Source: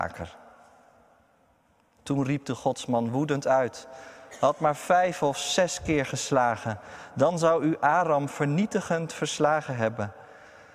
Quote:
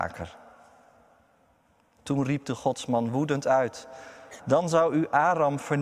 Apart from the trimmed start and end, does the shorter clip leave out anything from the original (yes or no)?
yes